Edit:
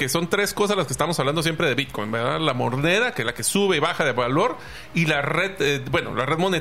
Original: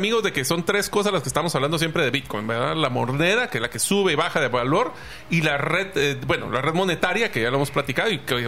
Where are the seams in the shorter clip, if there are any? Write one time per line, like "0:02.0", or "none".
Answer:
none